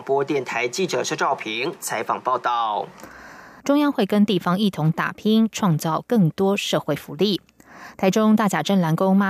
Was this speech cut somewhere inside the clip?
yes; 1 cut; at 3.6 s

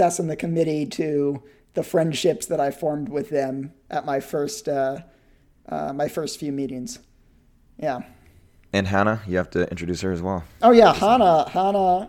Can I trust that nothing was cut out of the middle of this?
yes; 0 cuts

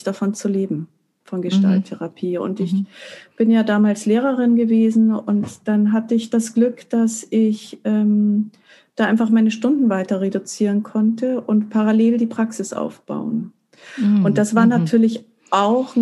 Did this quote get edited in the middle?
no; 0 cuts

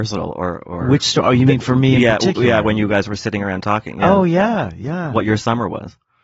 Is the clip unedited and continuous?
yes; 0 cuts

